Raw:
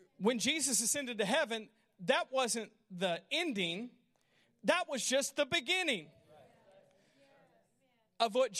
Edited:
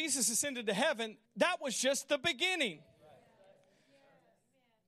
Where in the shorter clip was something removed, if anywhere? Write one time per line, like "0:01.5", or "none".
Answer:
0:01.2